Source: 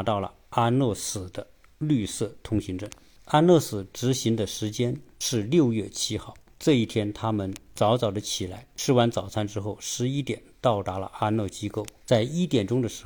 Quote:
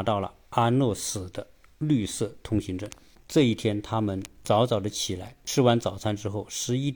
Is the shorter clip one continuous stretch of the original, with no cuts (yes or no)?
no